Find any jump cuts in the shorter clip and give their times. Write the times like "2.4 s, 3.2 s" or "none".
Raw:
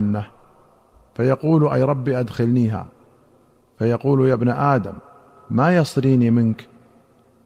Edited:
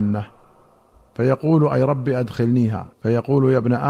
2.9 s